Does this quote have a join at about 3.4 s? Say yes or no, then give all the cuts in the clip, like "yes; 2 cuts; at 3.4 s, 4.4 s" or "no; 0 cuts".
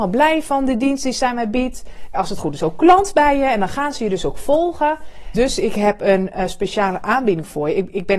no; 2 cuts; at 2.1 s, 5.3 s